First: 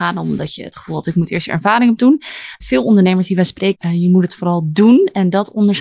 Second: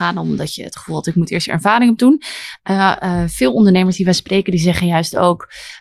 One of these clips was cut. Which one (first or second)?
first